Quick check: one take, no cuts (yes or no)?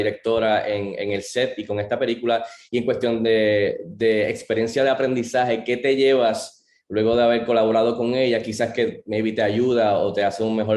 yes